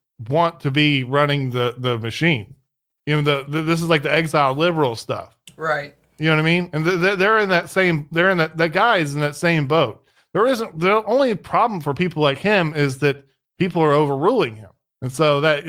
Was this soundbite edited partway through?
no; 0 cuts

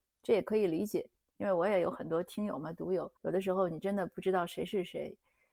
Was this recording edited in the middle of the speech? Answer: yes; 1 cut; at 3.2 s

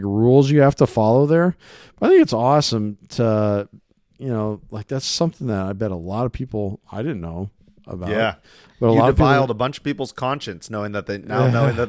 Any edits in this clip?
no; 0 cuts

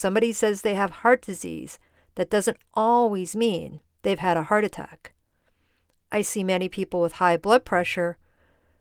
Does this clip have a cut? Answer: no; 0 cuts

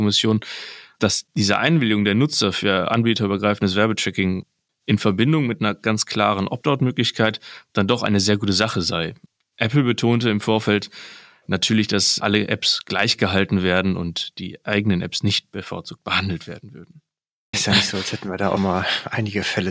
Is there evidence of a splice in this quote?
yes; 2 cuts; at 17.5 s, 18.6 s

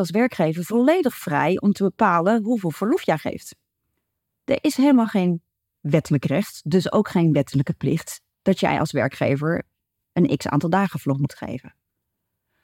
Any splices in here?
no; 0 cuts

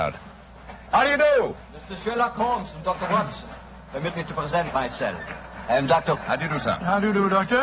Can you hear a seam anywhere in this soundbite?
yes; 1 cut; at 6.1 s

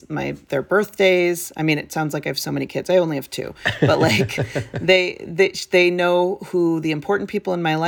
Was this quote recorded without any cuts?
yes; 0 cuts

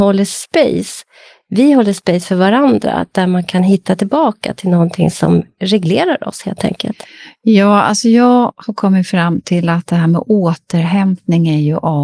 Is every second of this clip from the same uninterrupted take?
yes; 0 cuts

